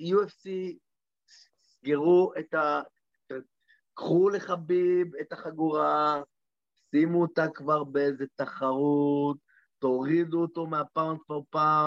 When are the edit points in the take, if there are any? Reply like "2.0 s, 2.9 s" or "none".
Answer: none